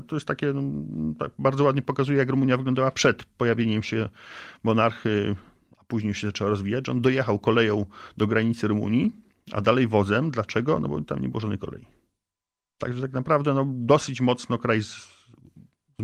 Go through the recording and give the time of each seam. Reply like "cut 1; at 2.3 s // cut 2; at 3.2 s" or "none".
none